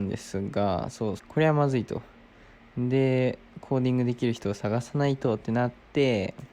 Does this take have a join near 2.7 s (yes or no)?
no